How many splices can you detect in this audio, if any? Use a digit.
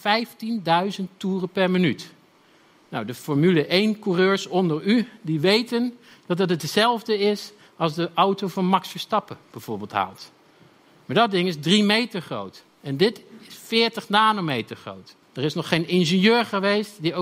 1